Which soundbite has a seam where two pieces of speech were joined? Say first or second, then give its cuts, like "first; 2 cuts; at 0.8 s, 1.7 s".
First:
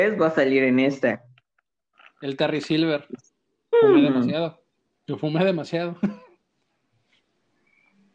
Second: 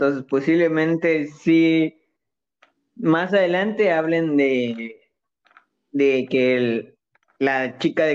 first; 1 cut; at 3.7 s